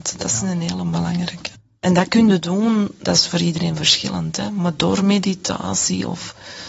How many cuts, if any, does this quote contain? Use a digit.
0